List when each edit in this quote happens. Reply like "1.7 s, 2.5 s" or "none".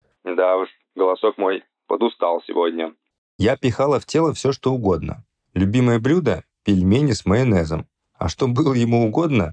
none